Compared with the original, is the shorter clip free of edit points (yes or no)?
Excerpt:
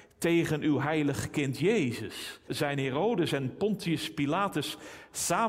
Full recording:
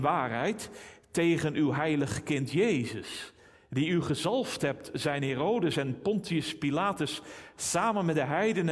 no